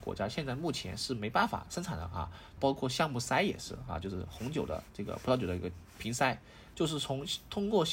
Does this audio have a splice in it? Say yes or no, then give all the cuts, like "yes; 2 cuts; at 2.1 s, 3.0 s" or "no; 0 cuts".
yes; 2 cuts; at 2.6 s, 6.7 s